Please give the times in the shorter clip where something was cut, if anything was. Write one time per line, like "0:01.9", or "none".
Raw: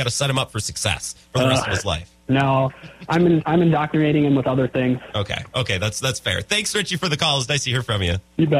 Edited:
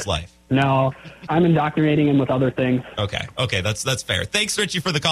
0:01.3